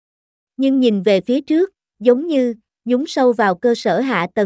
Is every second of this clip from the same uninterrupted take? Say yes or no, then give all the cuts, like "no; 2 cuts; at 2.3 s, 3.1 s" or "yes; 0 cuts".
no; 1 cut; at 1.9 s